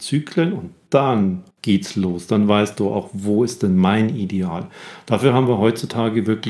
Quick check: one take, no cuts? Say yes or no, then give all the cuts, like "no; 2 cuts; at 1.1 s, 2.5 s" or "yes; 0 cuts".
no; 1 cut; at 1.5 s